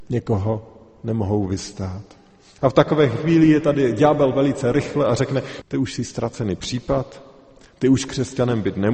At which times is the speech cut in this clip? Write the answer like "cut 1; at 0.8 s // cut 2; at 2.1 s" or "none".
cut 1; at 2.6 s // cut 2; at 5.6 s